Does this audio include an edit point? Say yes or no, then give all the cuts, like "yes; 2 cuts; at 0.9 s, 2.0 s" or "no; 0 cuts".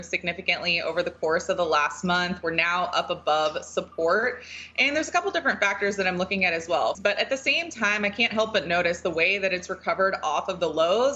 yes; 1 cut; at 6.9 s